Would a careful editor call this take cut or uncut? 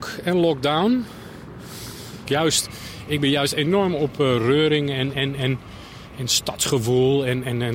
cut